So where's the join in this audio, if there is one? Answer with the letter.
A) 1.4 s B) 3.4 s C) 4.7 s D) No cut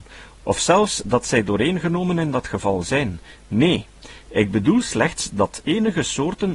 D